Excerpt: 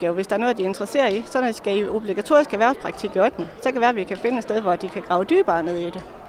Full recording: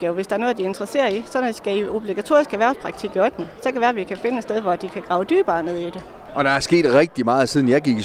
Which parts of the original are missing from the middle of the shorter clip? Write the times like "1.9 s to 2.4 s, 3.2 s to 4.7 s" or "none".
none